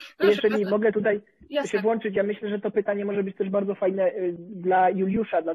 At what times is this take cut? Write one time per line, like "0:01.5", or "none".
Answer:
none